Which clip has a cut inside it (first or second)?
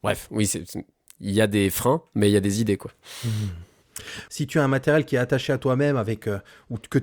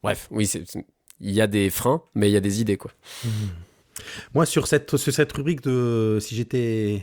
first